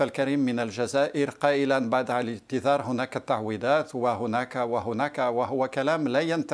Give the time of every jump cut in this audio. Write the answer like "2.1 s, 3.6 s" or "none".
5.1 s